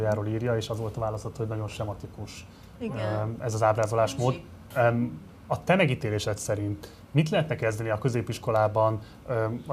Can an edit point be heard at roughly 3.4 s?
no; 1 cut; at 4.7 s

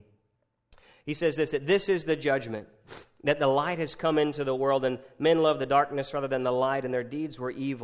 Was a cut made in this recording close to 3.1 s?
no; 0 cuts

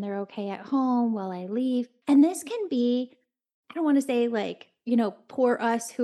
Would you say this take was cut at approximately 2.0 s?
yes; 1 cut; at 2.0 s

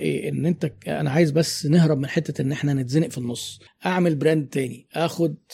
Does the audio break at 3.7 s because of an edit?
yes; 1 cut; at 3.7 s

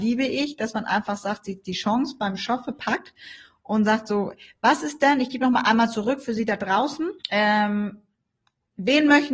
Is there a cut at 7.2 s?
yes; 1 cut; at 7.2 s

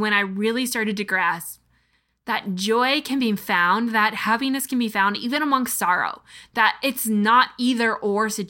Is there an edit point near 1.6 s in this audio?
no; 0 cuts

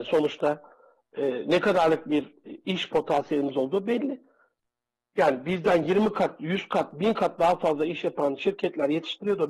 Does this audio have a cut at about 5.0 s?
no; 0 cuts

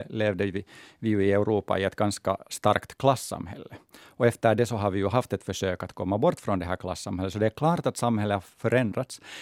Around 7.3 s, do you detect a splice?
no; 0 cuts

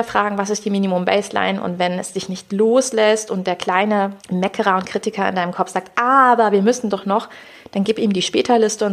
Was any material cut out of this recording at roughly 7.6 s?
no; 1 cut; at 4.2 s

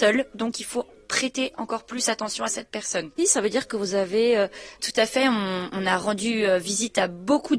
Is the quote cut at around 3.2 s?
yes; 2 cuts; at 3.2 s, 4.8 s

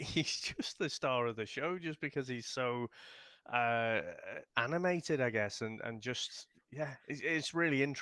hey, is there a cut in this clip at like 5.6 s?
no; 0 cuts

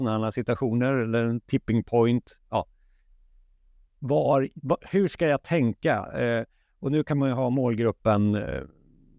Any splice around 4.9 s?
yes; 1 cut; at 4.9 s

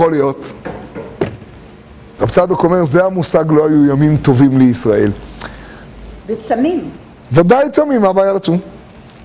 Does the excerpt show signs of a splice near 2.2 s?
yes; 2 cuts; at 2.2 s, 6.2 s

